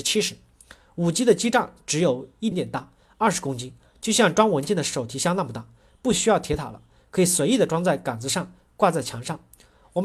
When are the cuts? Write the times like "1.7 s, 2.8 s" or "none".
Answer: 2.5 s